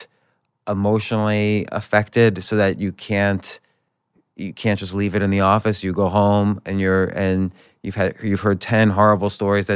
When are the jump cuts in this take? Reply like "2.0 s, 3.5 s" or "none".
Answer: none